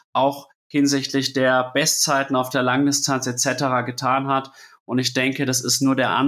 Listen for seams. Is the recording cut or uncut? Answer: uncut